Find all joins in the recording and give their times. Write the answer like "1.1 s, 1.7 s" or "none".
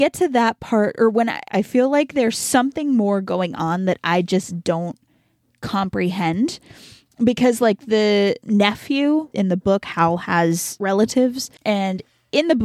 1.5 s